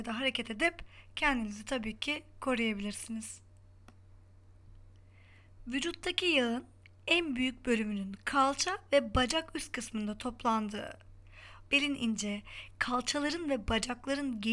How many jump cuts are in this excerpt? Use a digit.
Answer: 1